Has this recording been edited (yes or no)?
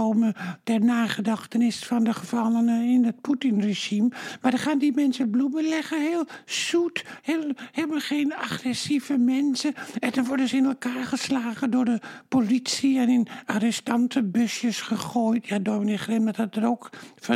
yes